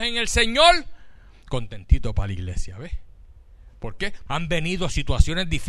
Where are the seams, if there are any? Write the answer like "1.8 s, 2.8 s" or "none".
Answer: 4.3 s